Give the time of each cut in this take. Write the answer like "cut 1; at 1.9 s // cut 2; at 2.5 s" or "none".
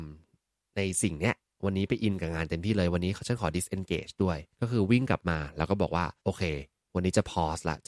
cut 1; at 4.5 s // cut 2; at 6.2 s

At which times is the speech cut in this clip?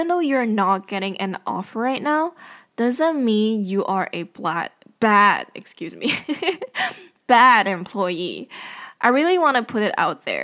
none

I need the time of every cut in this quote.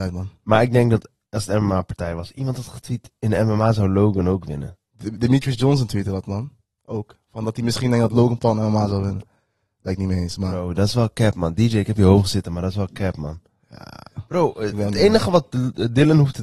none

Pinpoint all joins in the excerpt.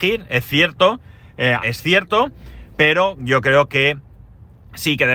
cut 1; at 1.6 s

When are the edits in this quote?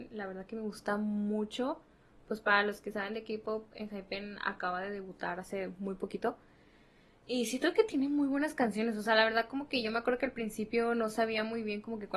none

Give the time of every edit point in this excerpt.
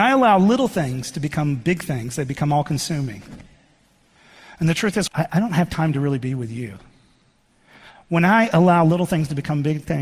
cut 1; at 5.1 s

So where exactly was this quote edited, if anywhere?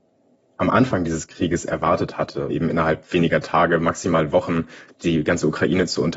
cut 1; at 2.5 s

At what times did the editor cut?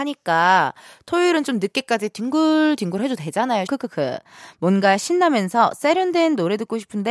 cut 1; at 3.7 s

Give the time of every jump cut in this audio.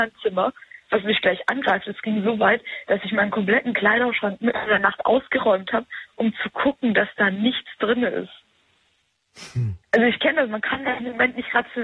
cut 1; at 9.8 s

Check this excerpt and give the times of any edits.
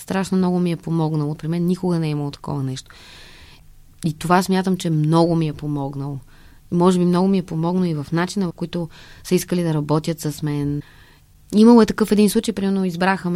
cut 1; at 1.4 s // cut 2; at 8.6 s

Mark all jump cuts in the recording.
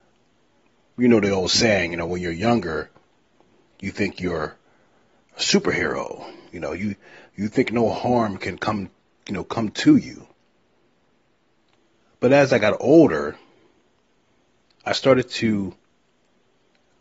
none

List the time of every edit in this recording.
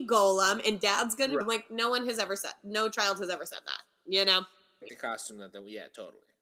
cut 1; at 1.4 s // cut 2; at 4.8 s

